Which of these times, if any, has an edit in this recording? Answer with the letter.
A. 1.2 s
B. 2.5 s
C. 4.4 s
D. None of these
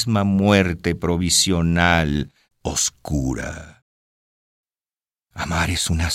B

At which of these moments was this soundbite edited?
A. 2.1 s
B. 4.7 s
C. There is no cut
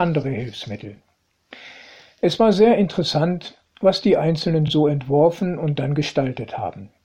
C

